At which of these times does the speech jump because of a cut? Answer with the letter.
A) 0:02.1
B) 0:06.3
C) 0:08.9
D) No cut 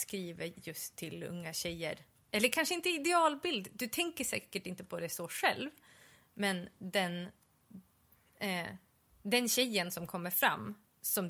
A